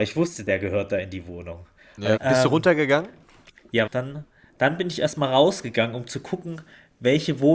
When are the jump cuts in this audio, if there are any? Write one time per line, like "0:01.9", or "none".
0:02.2
0:03.9